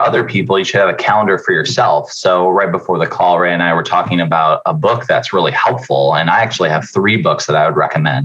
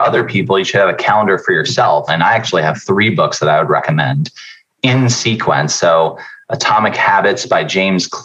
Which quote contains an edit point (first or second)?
second